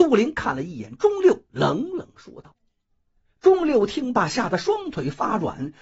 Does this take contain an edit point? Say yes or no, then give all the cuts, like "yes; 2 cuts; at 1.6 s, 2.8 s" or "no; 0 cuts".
no; 0 cuts